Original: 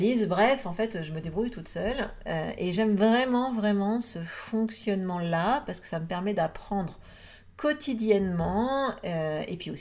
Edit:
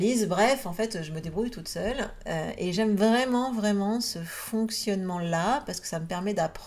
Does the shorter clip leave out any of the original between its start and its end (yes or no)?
no